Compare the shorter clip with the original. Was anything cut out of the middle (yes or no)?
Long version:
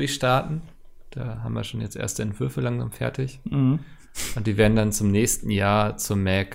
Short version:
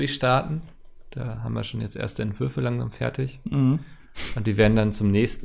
no